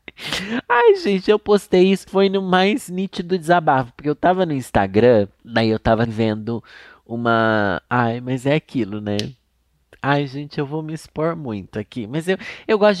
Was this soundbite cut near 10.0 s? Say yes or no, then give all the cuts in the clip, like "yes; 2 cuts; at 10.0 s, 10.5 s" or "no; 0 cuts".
no; 1 cut; at 6.0 s